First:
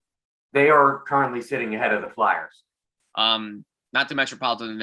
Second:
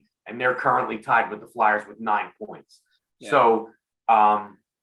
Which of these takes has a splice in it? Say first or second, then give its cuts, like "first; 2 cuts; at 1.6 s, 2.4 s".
first; 1 cut; at 3.0 s